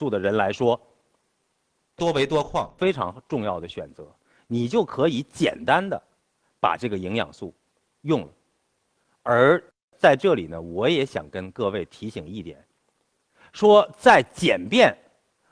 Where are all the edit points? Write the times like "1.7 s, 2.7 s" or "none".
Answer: none